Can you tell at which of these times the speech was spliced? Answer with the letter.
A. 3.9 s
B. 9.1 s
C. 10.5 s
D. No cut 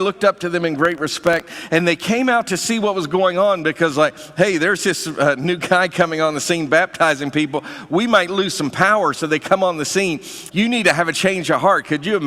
C